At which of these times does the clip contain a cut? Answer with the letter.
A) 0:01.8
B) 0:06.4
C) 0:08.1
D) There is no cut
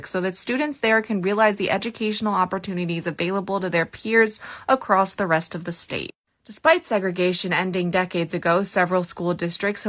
D